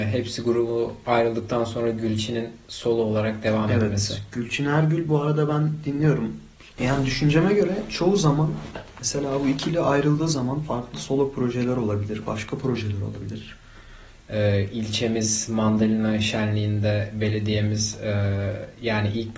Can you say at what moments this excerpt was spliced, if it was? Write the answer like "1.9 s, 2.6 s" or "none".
6.7 s, 14.2 s